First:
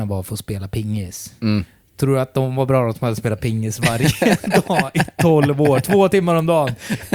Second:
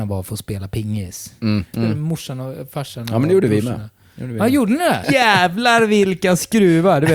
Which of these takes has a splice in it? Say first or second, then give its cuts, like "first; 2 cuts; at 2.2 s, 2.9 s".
second; 2 cuts; at 1.7 s, 5.0 s